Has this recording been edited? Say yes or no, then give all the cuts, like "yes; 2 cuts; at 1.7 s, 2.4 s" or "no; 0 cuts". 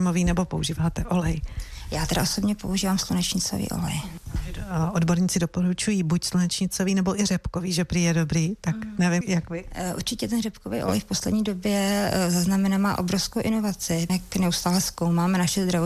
yes; 2 cuts; at 9.2 s, 14.1 s